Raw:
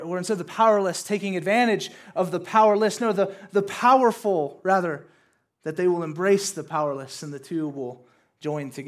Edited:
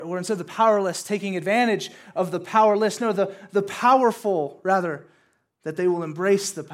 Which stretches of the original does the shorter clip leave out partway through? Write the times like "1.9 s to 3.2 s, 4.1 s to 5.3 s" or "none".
none

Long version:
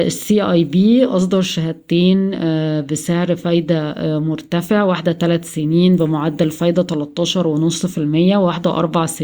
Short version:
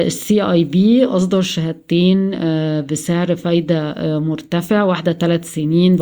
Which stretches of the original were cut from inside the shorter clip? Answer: none

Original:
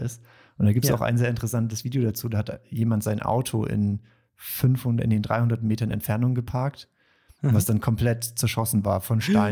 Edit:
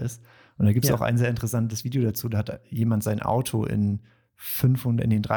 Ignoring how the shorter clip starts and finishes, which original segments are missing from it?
none

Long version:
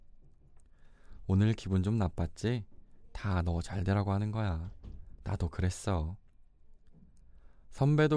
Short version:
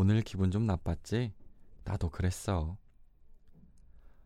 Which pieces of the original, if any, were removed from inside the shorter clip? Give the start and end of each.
3.1 s to 5.2 s

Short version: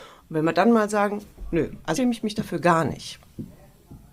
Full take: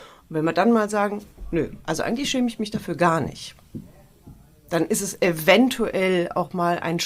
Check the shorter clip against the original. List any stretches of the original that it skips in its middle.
2.0 s to 2.3 s

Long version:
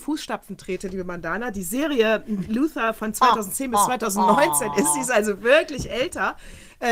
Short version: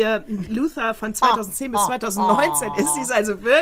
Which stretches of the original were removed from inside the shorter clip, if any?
none

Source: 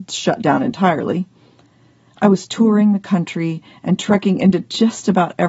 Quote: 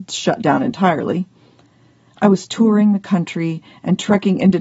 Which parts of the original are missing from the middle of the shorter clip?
none

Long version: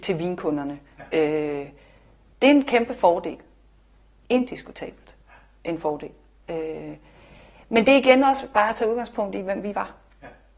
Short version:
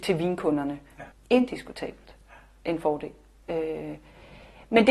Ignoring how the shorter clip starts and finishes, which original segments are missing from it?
1.1 s to 4.1 s

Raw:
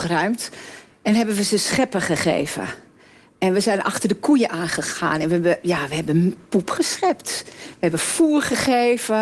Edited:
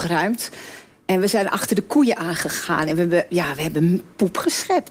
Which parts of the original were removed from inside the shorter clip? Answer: 1.0 s to 3.3 s

